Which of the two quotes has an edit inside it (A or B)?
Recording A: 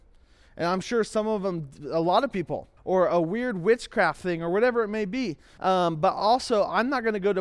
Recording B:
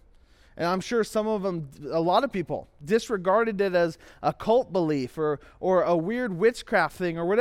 A